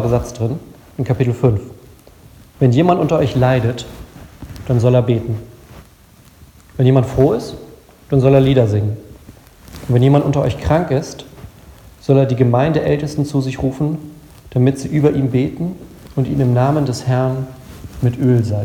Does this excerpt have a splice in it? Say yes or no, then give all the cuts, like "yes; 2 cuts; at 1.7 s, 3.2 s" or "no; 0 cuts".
no; 0 cuts